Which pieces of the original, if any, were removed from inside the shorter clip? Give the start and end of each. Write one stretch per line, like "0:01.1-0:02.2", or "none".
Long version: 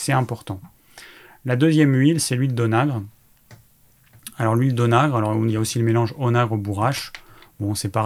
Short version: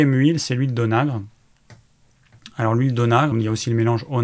0:05.1-0:05.4